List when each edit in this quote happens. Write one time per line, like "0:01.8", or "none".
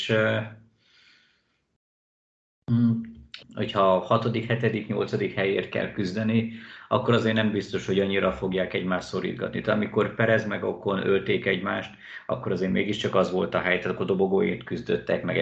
0:03.4